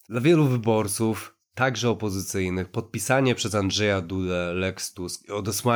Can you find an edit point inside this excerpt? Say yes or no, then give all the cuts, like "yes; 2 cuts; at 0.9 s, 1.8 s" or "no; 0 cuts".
no; 0 cuts